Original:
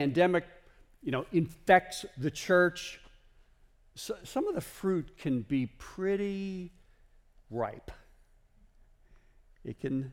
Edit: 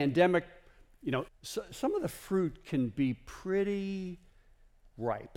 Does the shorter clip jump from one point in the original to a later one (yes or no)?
yes